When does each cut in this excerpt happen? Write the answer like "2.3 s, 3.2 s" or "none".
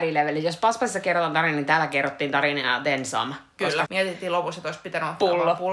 3.8 s